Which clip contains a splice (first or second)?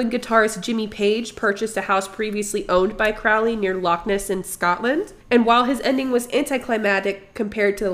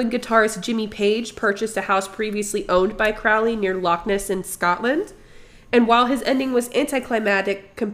first